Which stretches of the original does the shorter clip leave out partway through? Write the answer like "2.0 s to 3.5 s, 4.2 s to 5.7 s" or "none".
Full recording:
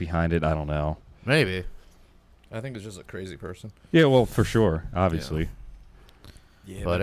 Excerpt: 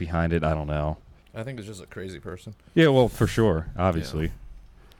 1.2 s to 2.4 s